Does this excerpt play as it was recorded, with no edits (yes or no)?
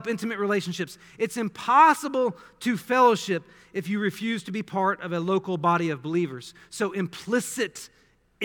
yes